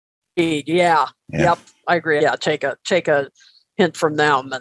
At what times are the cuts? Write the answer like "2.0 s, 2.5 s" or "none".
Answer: 2.2 s